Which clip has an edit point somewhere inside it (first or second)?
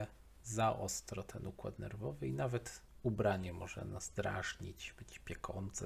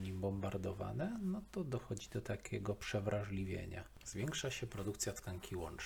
second